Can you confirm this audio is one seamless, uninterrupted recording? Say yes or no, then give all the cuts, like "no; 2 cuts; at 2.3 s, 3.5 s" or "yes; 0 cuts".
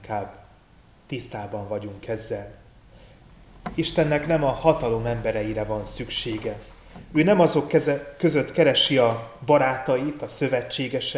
yes; 0 cuts